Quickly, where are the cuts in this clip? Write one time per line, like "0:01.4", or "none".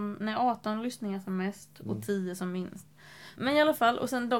0:03.4